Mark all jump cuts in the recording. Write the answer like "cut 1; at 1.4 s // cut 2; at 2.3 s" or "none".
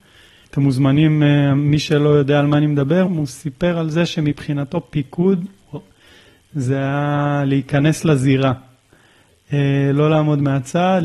cut 1; at 3.1 s